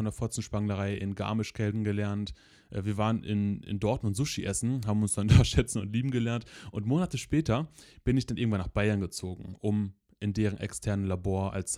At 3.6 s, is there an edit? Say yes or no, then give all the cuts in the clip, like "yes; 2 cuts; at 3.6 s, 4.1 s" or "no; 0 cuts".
no; 0 cuts